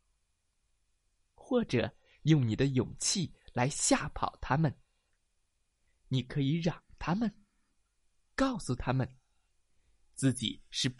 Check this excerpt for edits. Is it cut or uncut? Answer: uncut